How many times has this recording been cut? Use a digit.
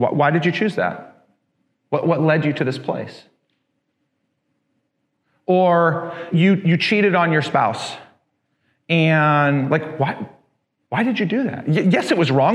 1